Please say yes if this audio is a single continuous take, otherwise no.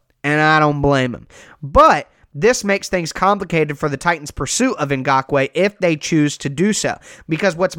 yes